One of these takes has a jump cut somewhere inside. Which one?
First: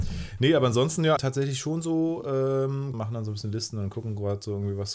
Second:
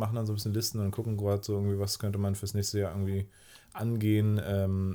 first; 2 cuts; at 1.2 s, 2.9 s

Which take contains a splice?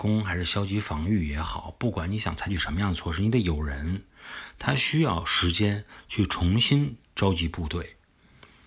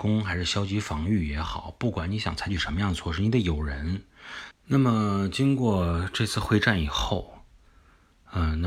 second; 1 cut; at 4.5 s

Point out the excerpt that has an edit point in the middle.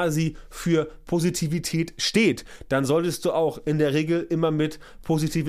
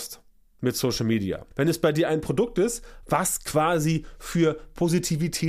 second; 1 cut; at 1.5 s

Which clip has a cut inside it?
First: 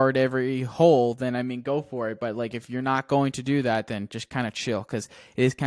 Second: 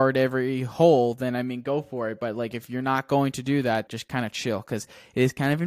second; 1 cut; at 3.9 s

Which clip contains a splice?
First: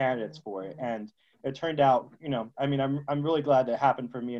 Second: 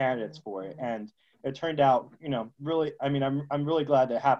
first; 1 cut; at 2.5 s

